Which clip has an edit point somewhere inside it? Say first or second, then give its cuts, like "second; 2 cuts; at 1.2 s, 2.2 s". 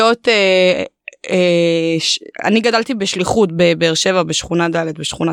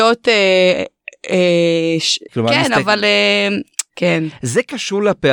second; 2 cuts; at 2.3 s, 3.9 s